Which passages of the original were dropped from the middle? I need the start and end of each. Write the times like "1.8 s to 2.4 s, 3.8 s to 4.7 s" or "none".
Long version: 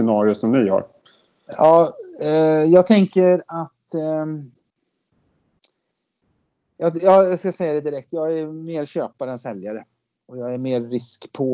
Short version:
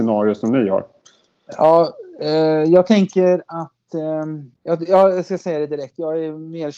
4.6 s to 6.7 s